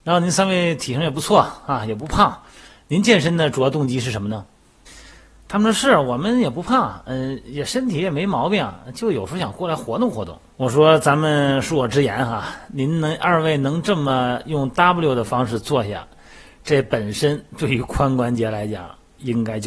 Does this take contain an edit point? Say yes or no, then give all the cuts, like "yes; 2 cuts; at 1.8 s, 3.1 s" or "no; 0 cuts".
yes; 1 cut; at 10.5 s